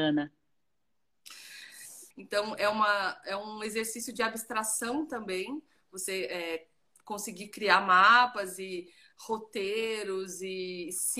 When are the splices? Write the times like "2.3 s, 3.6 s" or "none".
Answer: 2.1 s